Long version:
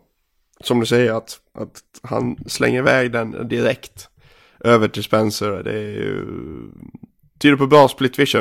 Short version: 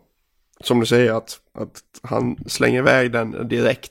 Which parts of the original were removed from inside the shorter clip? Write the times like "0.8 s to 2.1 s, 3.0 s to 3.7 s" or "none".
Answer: none